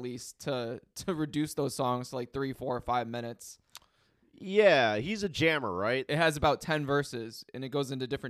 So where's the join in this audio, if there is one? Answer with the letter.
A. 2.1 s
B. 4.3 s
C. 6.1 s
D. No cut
C